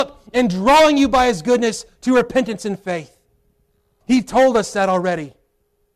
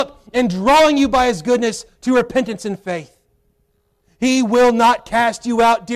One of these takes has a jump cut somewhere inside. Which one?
first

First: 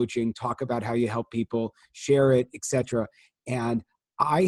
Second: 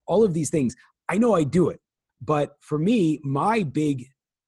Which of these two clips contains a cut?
second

